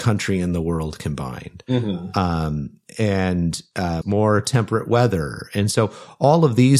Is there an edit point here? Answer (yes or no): yes